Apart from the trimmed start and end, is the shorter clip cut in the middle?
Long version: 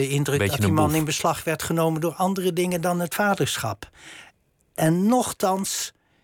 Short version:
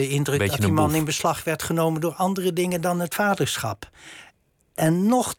no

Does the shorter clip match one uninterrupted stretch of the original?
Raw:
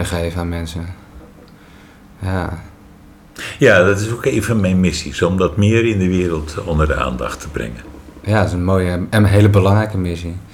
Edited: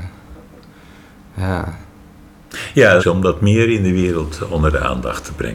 no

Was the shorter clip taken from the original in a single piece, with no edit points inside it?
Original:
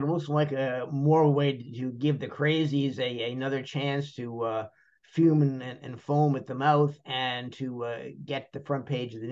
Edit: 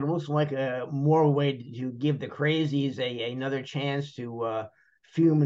yes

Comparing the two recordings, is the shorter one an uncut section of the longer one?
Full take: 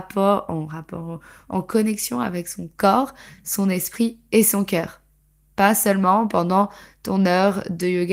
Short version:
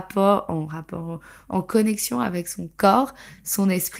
yes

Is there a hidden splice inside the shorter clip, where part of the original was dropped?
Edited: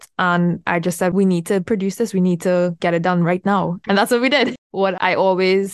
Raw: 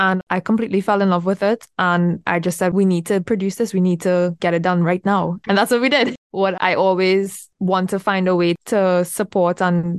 no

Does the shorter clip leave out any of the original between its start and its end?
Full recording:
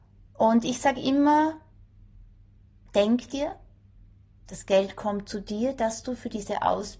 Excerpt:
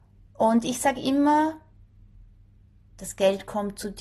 yes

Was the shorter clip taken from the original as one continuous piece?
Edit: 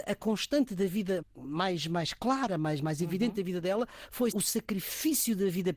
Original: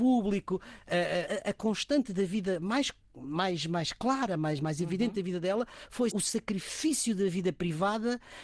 no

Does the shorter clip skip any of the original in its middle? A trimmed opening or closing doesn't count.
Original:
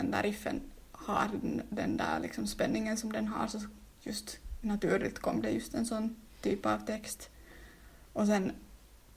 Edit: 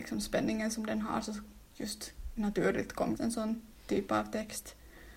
yes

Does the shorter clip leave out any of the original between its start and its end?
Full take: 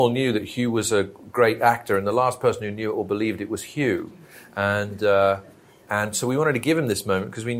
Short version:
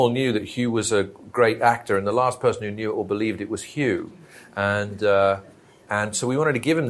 no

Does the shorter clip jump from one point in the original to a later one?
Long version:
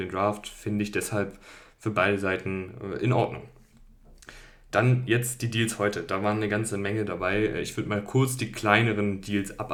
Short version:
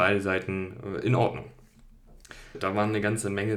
yes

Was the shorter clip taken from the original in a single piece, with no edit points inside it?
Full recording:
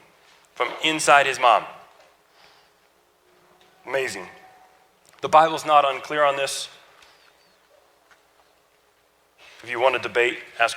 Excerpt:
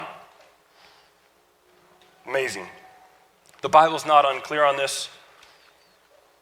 yes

